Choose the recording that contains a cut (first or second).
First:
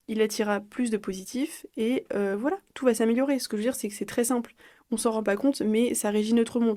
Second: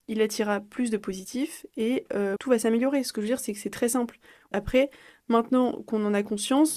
second